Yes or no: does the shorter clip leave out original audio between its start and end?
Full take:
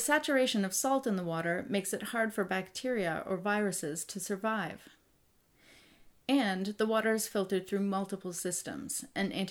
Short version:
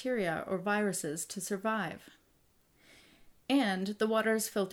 no